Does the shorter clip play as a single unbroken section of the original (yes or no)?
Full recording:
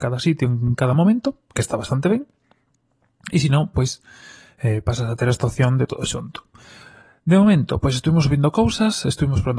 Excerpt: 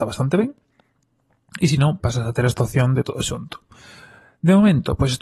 no